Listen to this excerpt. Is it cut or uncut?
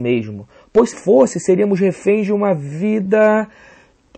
cut